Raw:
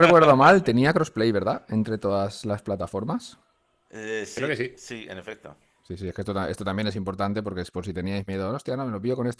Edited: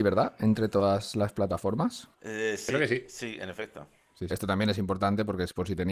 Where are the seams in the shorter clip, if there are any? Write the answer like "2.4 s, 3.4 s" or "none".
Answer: 2.1 s, 4.3 s